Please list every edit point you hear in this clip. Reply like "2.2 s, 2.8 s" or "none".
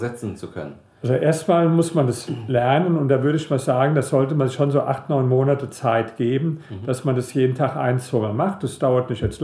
none